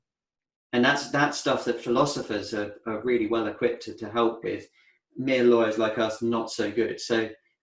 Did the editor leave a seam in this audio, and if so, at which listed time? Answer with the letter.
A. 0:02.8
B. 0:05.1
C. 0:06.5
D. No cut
D